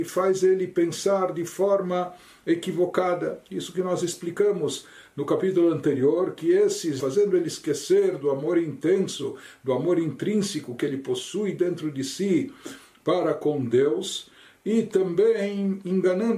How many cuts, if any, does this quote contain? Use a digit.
1